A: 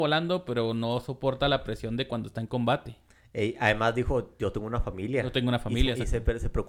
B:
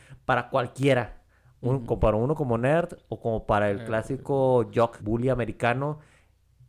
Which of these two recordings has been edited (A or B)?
B